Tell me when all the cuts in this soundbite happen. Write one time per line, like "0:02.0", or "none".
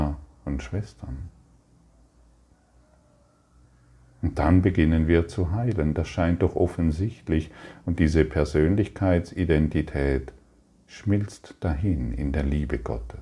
none